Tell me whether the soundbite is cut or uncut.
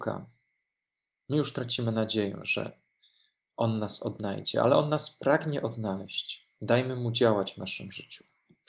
uncut